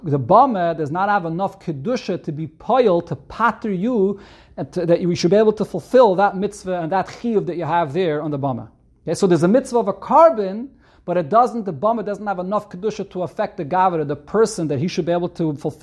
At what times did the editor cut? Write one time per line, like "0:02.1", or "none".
none